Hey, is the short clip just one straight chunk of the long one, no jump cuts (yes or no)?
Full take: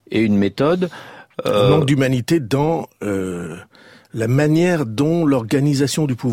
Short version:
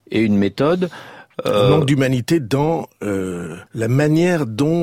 no